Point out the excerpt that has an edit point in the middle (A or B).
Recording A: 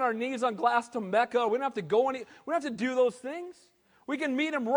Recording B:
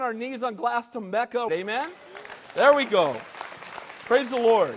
B